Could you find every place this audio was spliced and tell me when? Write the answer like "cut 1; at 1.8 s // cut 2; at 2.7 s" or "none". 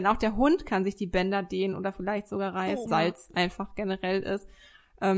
cut 1; at 2.9 s